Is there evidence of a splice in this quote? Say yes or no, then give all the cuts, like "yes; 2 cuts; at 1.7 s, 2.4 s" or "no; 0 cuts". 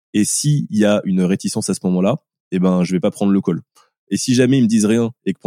no; 0 cuts